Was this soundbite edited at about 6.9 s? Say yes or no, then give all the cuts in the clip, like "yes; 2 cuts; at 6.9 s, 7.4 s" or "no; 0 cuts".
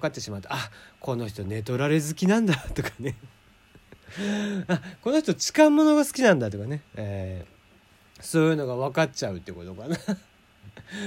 no; 0 cuts